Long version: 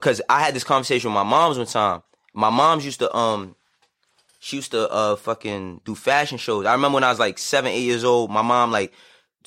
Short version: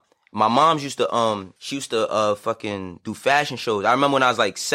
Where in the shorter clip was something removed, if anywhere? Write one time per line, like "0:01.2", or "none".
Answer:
0:01.6